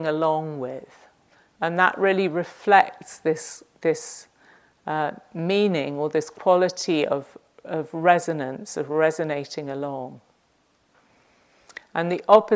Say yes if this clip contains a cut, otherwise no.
no